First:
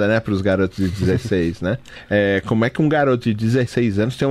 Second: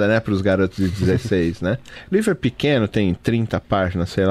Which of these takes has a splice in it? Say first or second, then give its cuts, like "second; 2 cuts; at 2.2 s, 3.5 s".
second; 1 cut; at 2.0 s